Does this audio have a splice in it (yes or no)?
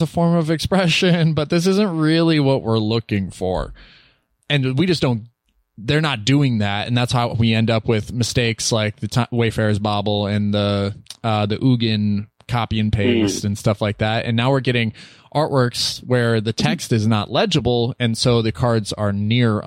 no